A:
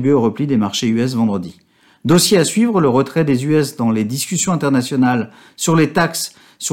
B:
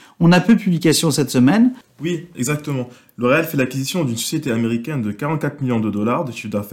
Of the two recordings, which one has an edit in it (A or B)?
B